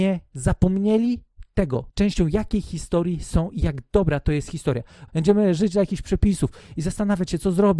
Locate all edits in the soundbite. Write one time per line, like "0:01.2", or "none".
0:05.1